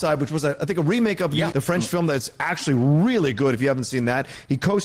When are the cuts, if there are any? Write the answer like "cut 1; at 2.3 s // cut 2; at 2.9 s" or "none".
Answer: cut 1; at 1.5 s